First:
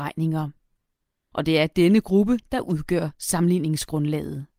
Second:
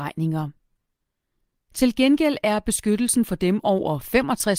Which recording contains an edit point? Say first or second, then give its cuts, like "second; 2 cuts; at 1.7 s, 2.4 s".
first; 1 cut; at 1.3 s